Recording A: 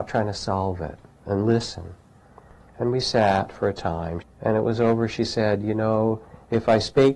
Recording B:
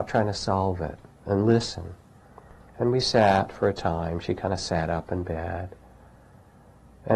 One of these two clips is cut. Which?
A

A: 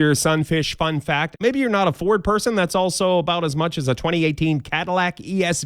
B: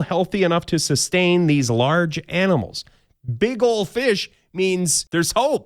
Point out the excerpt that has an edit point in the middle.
A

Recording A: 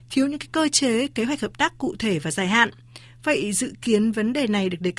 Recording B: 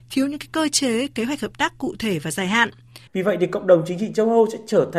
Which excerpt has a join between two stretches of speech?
B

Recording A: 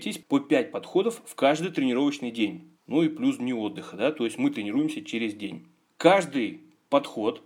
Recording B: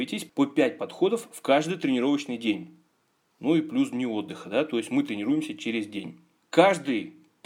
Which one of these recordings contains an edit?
A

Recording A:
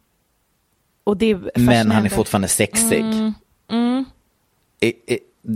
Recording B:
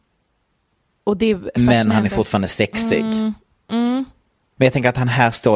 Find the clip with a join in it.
B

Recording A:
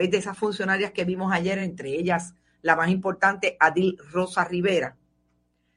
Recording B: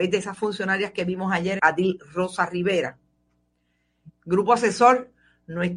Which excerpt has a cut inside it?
B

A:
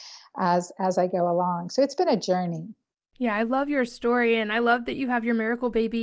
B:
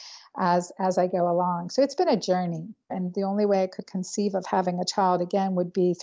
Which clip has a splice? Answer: B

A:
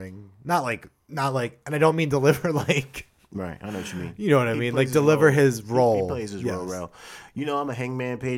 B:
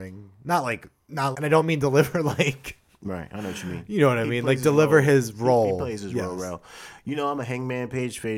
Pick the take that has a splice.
B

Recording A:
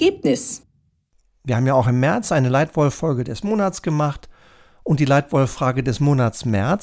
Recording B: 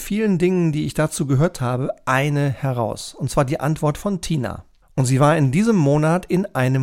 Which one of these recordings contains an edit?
B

